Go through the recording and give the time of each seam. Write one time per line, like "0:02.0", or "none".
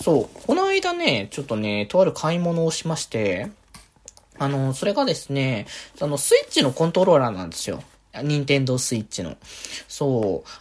none